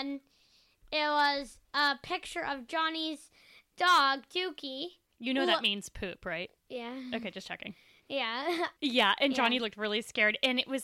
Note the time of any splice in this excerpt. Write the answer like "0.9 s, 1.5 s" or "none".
6.6 s, 8.8 s